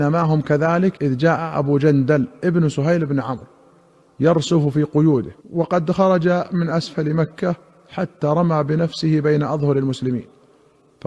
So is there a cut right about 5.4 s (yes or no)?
yes